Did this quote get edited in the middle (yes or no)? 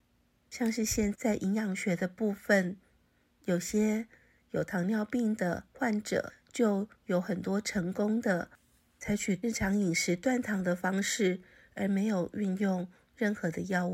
yes